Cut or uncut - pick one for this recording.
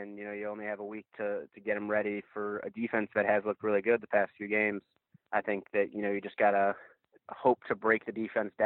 uncut